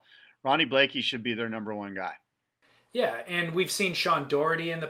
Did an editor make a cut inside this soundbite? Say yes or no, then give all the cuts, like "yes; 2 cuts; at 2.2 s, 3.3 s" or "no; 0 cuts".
no; 0 cuts